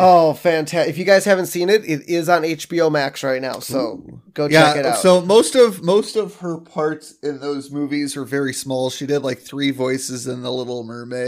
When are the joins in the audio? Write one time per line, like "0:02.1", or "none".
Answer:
none

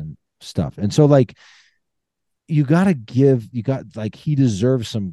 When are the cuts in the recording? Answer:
none

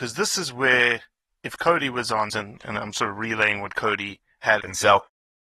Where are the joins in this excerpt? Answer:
0:02.3
0:04.6

